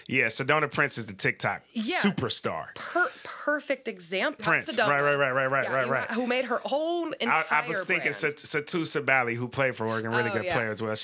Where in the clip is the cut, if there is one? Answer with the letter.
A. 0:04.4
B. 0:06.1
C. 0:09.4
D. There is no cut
A